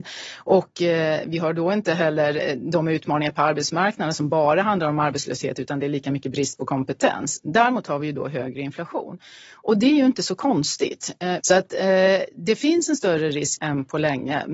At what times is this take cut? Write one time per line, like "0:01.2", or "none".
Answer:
0:11.4
0:13.6

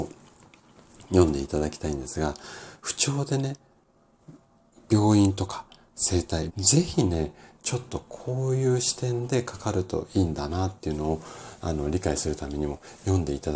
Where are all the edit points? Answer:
0:06.5

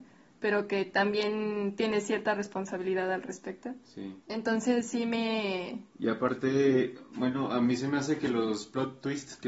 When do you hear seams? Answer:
0:04.2
0:05.9

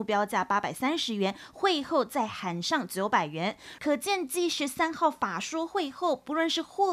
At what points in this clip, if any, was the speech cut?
0:03.8

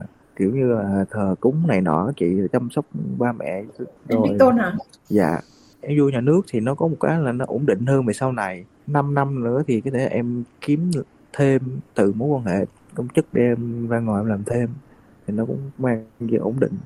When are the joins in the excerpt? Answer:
none

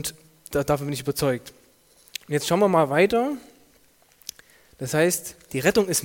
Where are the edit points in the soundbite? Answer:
none

